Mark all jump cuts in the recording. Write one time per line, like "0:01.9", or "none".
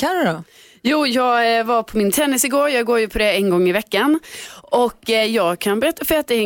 none

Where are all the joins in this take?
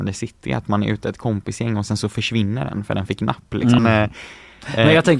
0:03.8

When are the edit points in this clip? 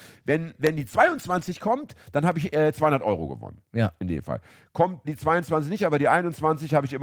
0:05.0

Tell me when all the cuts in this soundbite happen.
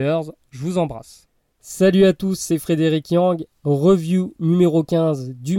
none

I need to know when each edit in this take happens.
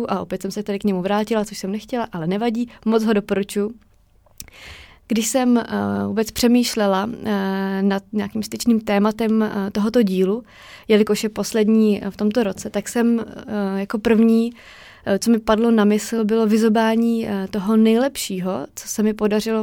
none

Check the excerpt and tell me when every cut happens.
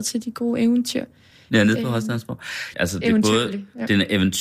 0:02.7

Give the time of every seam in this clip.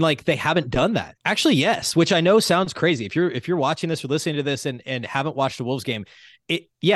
0:01.2

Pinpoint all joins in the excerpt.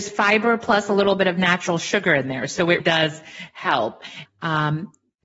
0:02.8
0:04.3

